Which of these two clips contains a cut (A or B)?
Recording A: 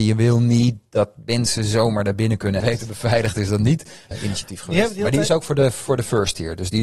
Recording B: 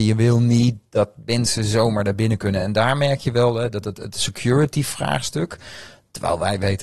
A